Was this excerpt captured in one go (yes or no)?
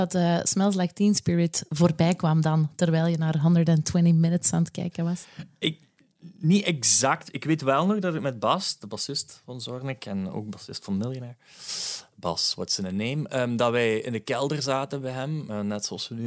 yes